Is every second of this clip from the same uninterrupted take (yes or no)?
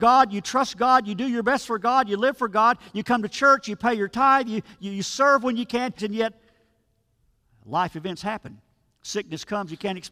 no